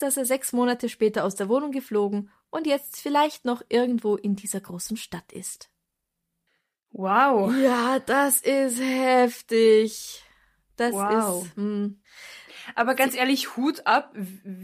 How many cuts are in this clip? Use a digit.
0